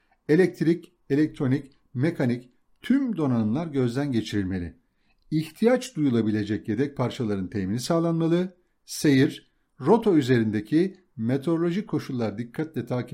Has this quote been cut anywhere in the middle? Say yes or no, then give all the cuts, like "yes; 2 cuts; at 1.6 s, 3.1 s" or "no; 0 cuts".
no; 0 cuts